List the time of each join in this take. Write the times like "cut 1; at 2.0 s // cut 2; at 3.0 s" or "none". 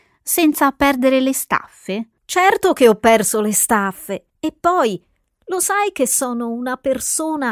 cut 1; at 4.3 s